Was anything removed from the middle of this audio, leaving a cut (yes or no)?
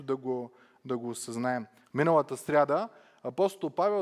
yes